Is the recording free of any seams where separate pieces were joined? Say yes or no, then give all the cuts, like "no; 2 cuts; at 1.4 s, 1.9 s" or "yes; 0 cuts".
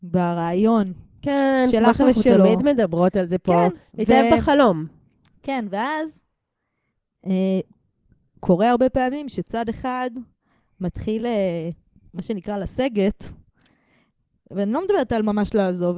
yes; 0 cuts